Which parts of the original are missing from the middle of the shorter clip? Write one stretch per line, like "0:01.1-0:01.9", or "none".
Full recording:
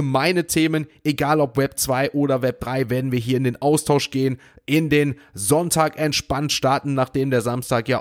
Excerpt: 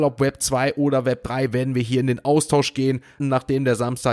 0:04.6-0:06.9